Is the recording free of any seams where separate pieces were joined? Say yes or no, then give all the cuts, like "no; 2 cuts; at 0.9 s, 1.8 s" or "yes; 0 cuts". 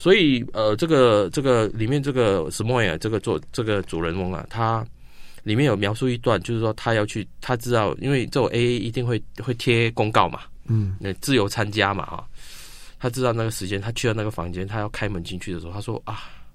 yes; 0 cuts